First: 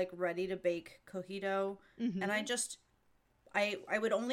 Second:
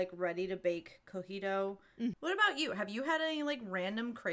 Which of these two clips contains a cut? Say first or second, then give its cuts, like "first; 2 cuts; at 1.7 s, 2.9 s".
second; 1 cut; at 2.1 s